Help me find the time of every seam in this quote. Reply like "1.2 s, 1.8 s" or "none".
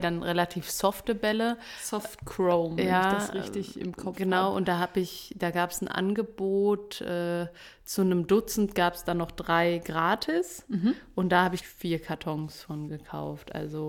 11.6 s